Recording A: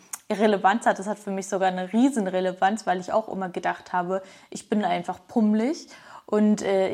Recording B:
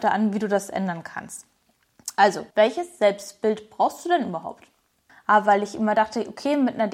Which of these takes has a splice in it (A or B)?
B